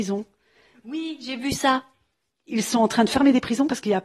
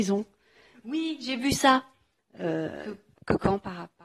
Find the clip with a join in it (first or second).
second